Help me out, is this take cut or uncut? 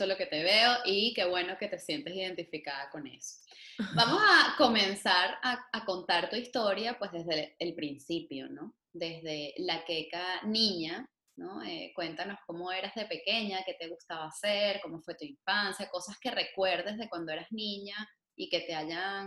uncut